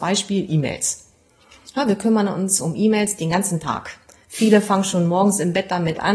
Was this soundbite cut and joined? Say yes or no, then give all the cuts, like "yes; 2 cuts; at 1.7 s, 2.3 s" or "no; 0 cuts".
no; 0 cuts